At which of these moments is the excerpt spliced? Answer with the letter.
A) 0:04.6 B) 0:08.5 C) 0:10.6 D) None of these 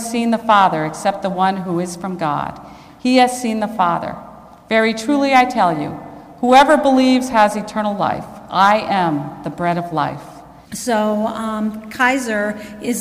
C